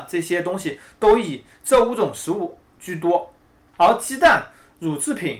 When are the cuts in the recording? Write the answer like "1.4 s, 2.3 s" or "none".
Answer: 3.7 s